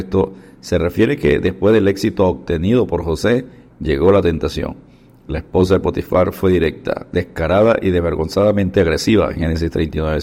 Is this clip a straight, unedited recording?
yes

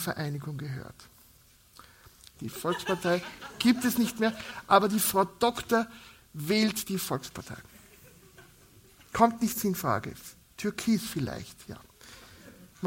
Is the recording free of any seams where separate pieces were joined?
no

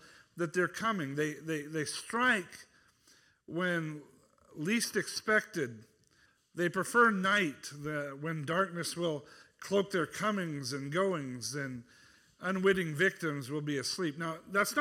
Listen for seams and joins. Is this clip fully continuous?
yes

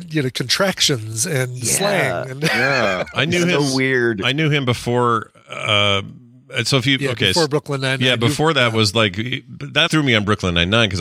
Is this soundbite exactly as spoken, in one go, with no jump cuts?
no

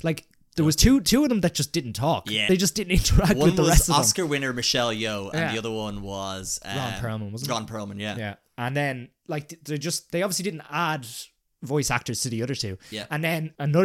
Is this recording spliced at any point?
no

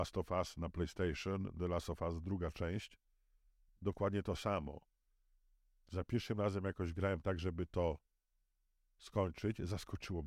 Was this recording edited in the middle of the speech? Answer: no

